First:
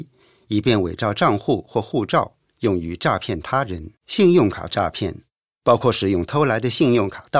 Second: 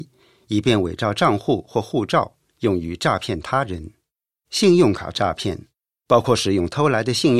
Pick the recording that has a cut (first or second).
first